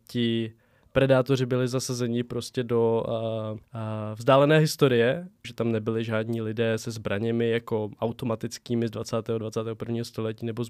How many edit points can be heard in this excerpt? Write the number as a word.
two